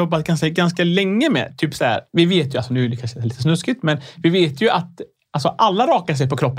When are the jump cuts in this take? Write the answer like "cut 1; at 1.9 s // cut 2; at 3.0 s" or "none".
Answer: cut 1; at 2.1 s